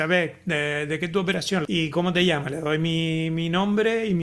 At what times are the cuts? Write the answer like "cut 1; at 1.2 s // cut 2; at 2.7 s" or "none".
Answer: cut 1; at 1.6 s

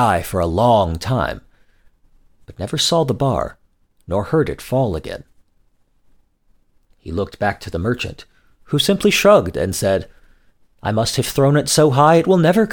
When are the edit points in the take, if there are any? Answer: none

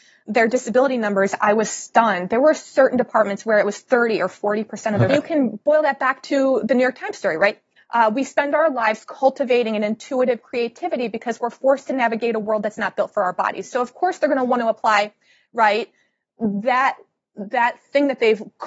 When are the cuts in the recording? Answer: cut 1; at 5.1 s // cut 2; at 7.8 s

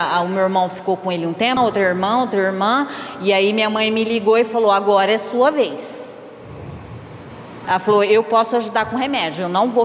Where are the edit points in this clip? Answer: cut 1; at 1.6 s // cut 2; at 7.6 s

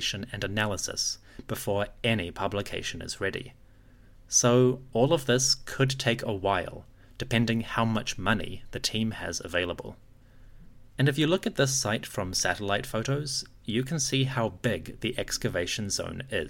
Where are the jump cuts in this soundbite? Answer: cut 1; at 10.9 s

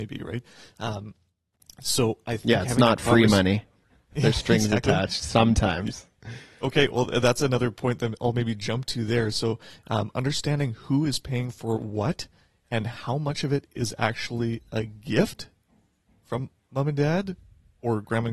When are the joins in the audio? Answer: none

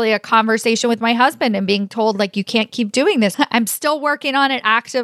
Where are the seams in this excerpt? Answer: cut 1; at 3.3 s

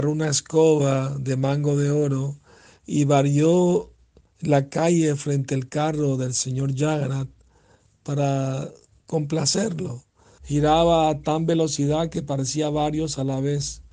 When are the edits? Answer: cut 1; at 10.4 s

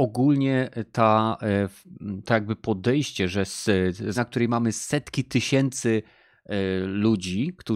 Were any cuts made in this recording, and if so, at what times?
cut 1; at 2.2 s // cut 2; at 4.2 s

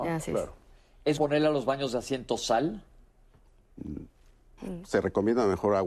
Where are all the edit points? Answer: cut 1; at 1.2 s // cut 2; at 4.6 s

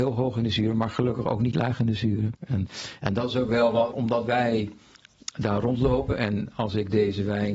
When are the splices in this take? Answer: cut 1; at 2.4 s // cut 2; at 3.9 s

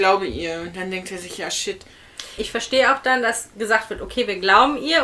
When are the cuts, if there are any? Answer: cut 1; at 2.4 s

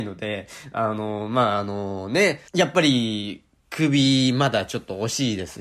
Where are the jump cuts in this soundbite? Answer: cut 1; at 2.5 s

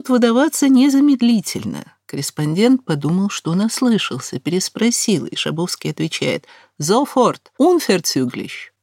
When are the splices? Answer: cut 1; at 7.5 s

